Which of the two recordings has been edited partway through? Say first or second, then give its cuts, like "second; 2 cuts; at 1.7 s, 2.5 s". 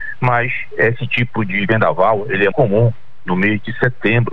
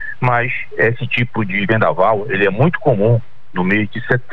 first; 1 cut; at 2.5 s